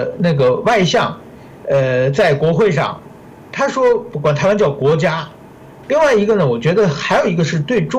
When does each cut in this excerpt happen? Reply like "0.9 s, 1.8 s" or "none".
5.8 s